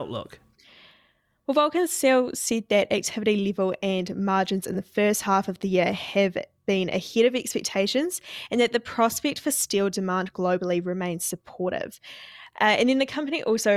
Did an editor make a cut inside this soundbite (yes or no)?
yes